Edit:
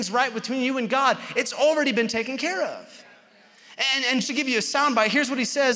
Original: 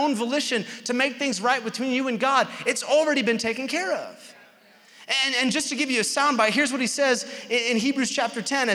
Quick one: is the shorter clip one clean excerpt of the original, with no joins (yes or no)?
no